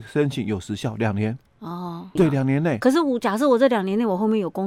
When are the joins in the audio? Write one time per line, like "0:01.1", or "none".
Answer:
0:02.2